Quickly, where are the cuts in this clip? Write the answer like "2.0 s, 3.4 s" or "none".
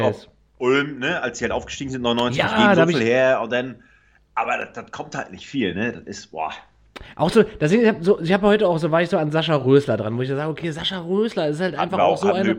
none